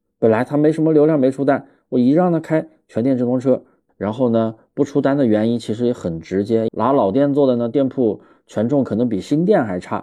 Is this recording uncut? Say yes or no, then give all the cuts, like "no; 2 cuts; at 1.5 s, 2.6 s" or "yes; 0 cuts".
no; 2 cuts; at 3.9 s, 6.7 s